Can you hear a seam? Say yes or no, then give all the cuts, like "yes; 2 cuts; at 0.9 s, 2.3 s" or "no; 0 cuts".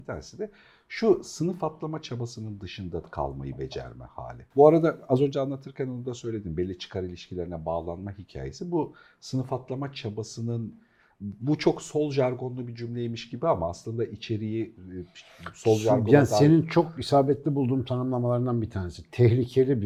no; 0 cuts